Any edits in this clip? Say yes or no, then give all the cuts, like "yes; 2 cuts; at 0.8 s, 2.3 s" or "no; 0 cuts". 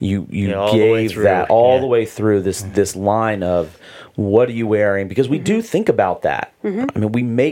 no; 0 cuts